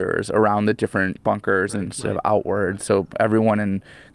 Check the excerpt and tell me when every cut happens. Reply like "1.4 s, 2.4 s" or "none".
1.8 s